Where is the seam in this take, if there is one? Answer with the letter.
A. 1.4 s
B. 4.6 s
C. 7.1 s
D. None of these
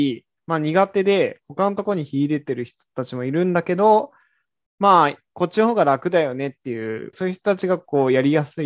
C